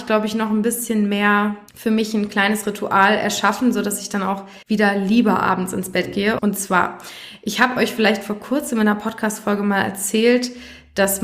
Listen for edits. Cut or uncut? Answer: cut